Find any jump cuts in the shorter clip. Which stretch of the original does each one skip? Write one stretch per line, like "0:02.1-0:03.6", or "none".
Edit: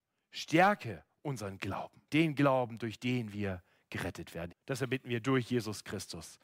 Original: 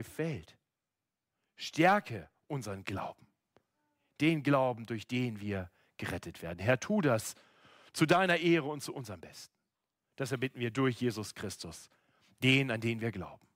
0:03.3-0:04.1
0:06.6-0:10.0